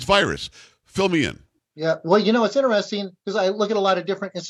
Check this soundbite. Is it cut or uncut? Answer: uncut